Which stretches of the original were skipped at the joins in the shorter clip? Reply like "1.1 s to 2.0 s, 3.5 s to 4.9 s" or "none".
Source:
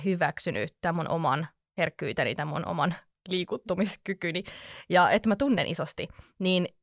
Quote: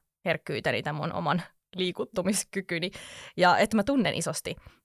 none